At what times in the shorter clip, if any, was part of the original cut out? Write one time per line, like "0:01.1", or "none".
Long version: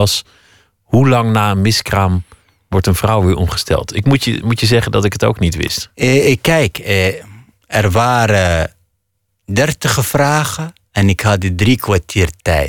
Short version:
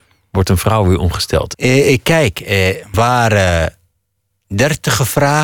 0:01.5
0:02.9